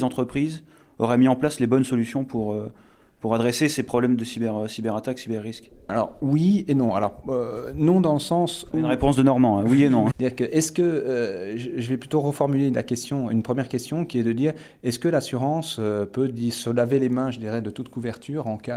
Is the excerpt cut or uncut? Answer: cut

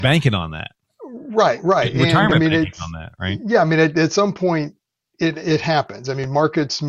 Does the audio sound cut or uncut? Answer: uncut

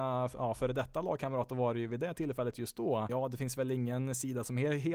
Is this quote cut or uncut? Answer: cut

